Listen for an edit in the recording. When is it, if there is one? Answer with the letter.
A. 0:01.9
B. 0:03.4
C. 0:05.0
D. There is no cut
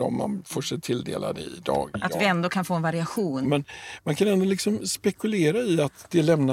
B